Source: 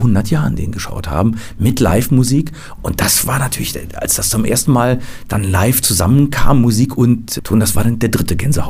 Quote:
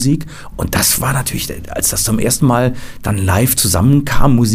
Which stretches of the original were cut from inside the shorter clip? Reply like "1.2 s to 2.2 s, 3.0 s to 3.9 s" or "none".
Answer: none